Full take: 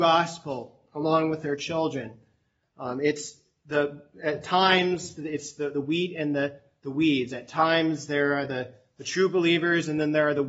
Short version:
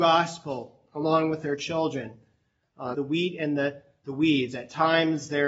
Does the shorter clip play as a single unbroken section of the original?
no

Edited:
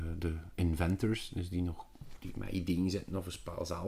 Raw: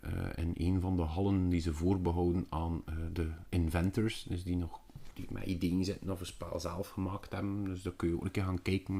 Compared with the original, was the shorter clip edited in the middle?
no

